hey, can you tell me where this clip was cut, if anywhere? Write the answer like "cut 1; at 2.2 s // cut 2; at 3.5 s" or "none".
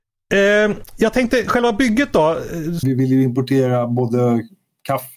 cut 1; at 2.8 s